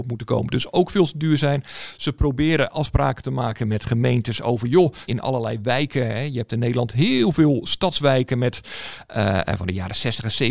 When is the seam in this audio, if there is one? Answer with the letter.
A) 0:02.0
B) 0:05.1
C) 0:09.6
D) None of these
B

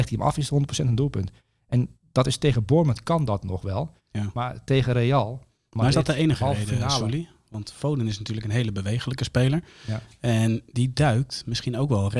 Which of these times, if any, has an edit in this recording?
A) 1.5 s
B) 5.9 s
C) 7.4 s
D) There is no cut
D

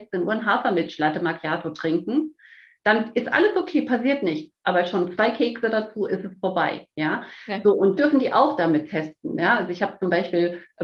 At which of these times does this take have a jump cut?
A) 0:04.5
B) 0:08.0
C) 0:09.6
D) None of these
B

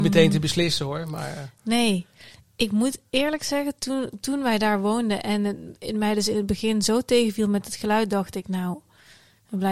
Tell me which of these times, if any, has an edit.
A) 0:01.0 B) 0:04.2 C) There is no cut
C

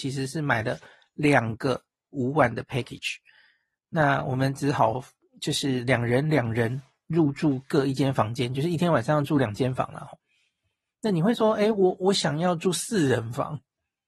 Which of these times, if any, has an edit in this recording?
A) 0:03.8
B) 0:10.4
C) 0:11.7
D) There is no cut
D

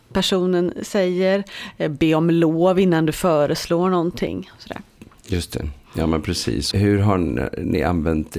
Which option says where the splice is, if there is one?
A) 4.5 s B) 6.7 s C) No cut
B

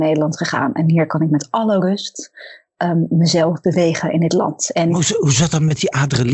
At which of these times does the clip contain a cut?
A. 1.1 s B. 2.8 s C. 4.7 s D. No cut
D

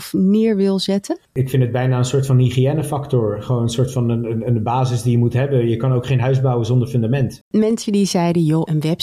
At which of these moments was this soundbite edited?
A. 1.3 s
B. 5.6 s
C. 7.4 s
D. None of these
C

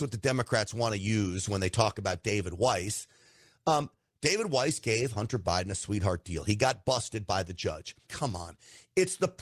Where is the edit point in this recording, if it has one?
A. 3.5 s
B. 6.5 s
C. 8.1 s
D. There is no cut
C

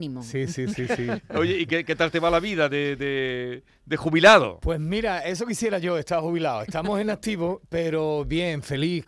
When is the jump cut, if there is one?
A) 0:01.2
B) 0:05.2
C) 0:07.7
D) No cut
D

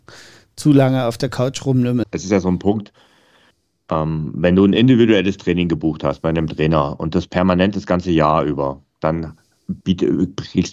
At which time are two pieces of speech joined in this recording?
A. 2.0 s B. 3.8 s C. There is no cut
A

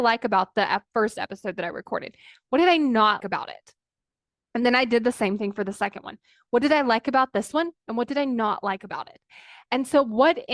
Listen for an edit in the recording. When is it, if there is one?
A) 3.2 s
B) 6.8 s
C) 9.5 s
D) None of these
A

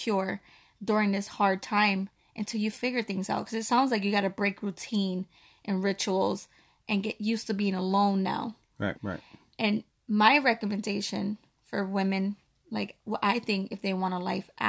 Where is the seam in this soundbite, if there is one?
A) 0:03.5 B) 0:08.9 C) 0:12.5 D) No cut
B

